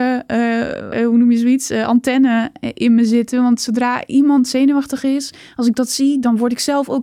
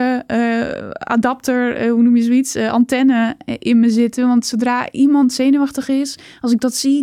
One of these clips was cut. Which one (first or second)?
first